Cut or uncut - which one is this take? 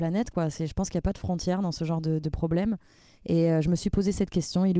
uncut